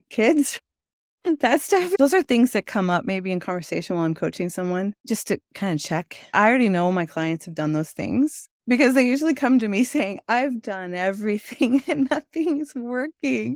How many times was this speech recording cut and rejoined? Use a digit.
0